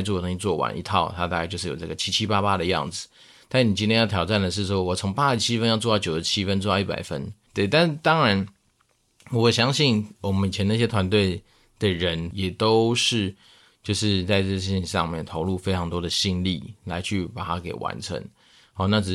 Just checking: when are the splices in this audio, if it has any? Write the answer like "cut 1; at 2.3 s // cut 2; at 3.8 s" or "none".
cut 1; at 7.5 s // cut 2; at 12.3 s